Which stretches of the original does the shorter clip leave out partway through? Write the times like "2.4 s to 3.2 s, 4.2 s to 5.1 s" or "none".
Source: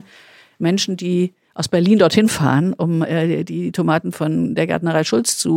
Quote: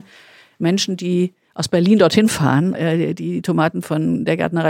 2.7 s to 3.0 s